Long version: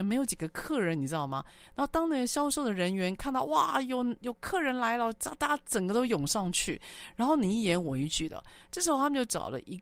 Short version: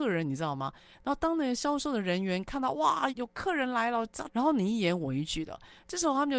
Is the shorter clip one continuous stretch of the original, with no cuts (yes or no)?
no